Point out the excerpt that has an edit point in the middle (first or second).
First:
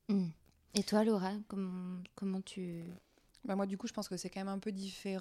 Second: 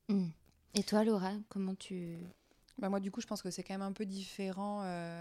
second